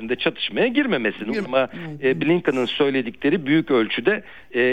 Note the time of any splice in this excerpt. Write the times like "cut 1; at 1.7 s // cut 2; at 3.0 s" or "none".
cut 1; at 1.4 s